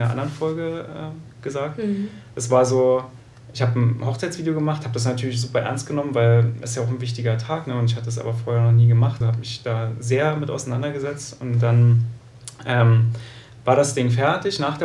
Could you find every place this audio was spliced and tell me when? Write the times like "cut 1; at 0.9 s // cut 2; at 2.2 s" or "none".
cut 1; at 9.2 s